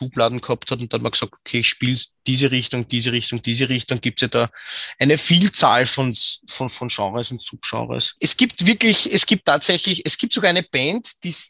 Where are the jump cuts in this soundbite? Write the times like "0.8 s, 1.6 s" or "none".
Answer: none